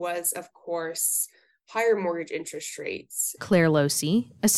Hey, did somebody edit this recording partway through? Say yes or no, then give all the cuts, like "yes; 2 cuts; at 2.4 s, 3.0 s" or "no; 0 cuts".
yes; 1 cut; at 3.4 s